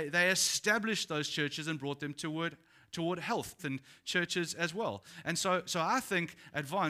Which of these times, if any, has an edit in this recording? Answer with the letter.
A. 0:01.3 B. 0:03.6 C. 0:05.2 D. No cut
B